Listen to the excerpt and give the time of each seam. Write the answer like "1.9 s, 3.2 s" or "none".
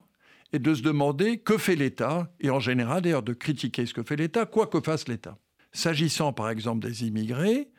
5.6 s